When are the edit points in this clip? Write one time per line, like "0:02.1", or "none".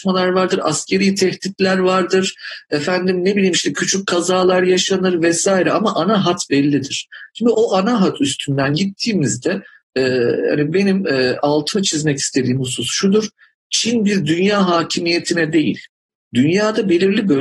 0:07.5